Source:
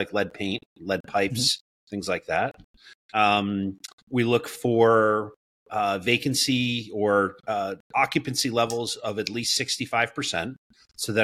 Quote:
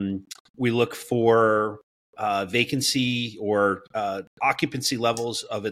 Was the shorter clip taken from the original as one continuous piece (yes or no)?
yes